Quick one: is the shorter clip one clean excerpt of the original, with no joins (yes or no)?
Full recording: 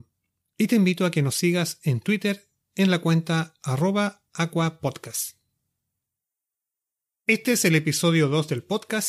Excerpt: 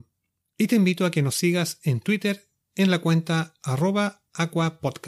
yes